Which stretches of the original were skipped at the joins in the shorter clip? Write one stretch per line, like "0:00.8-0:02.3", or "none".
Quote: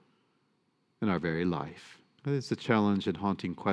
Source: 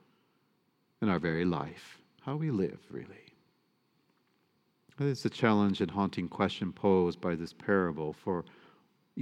0:02.2-0:04.9